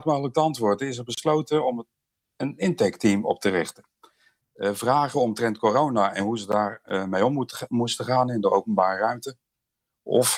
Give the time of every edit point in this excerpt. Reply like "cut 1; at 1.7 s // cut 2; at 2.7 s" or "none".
cut 1; at 4.4 s